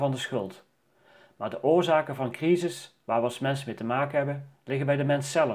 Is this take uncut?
yes; 0 cuts

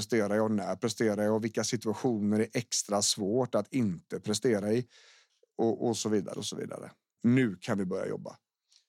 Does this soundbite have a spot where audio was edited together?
yes; 1 cut; at 7.2 s

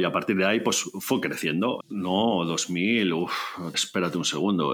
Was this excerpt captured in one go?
no; 2 cuts; at 1.8 s, 3.7 s

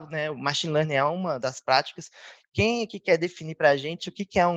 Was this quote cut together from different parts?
yes; 1 cut; at 2.4 s

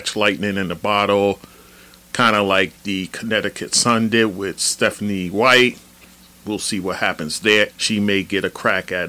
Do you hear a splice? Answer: yes; 1 cut; at 7.7 s

